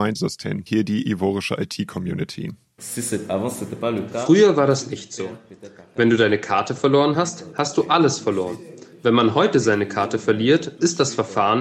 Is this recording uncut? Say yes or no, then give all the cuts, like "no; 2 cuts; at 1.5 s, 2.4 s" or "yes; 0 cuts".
yes; 0 cuts